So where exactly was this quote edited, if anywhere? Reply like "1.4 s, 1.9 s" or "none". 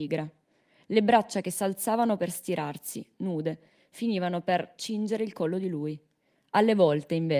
6.4 s